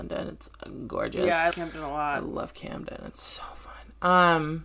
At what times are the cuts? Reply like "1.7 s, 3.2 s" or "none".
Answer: 1.5 s